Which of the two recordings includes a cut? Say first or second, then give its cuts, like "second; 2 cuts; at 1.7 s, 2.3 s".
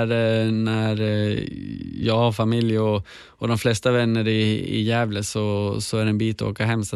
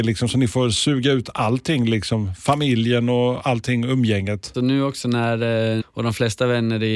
second; 2 cuts; at 4.5 s, 5.8 s